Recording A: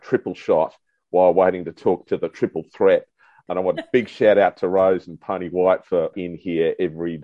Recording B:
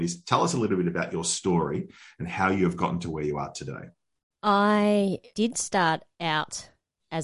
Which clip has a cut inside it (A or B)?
A